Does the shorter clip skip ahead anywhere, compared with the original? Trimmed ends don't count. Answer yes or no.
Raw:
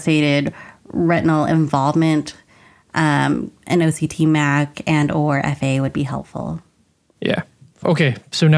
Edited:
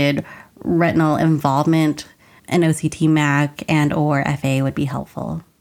yes